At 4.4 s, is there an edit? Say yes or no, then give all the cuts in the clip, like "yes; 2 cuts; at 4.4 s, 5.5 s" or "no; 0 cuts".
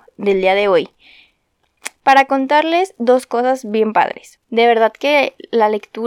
yes; 1 cut; at 4.4 s